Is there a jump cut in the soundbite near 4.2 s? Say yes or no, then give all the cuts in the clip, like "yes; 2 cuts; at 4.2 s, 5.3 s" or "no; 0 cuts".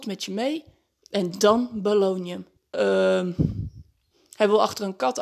no; 1 cut; at 2.6 s